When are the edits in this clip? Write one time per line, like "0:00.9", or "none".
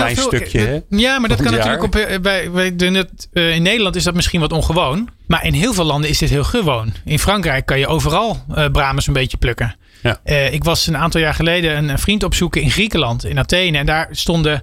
0:05.2